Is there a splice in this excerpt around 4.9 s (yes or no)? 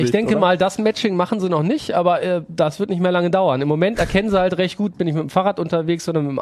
yes